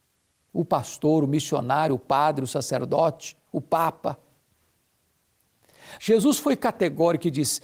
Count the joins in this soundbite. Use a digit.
1